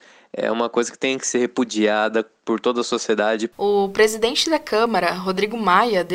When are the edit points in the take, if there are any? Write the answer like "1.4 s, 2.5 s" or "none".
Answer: 3.5 s